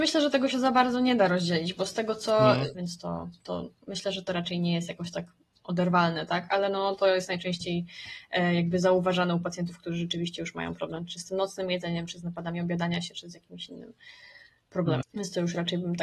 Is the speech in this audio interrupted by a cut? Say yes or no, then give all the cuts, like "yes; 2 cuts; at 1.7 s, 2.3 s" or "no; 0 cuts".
yes; 3 cuts; at 2.7 s, 6.5 s, 15.0 s